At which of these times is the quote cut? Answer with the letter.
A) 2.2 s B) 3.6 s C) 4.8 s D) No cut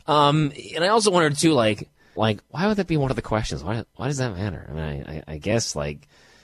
A